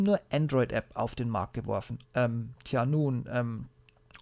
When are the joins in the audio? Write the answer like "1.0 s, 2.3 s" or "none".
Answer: 2.0 s